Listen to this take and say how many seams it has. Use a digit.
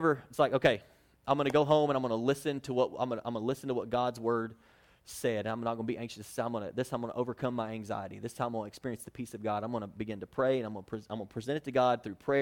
0